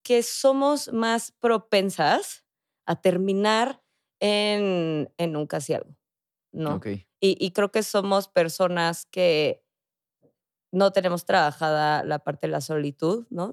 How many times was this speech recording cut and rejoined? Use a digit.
0